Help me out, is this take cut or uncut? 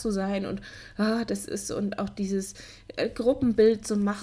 uncut